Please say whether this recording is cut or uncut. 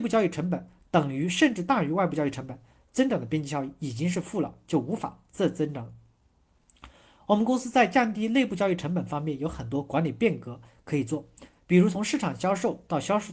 uncut